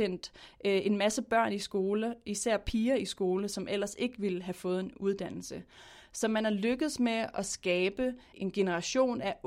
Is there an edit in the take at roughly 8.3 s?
yes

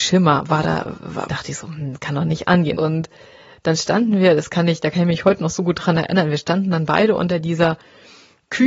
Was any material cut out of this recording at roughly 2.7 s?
yes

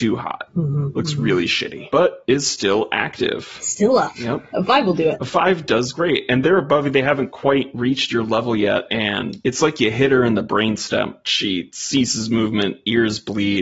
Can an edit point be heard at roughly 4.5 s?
yes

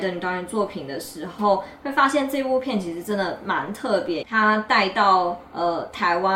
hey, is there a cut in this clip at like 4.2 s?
yes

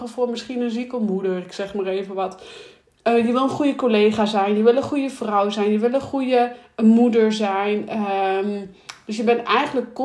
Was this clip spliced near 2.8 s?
no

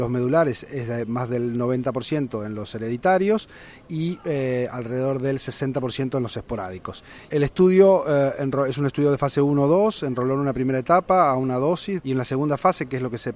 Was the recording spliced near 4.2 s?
no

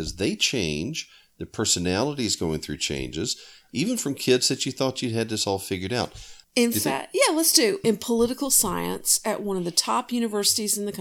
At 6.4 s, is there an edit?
yes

